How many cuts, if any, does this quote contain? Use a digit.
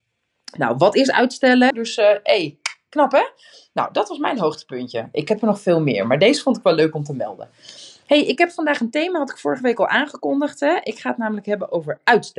1